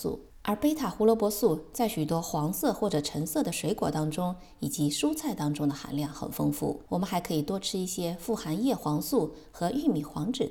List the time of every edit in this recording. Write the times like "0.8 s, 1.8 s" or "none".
6.9 s